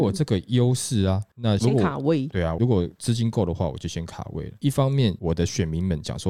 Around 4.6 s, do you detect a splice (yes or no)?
yes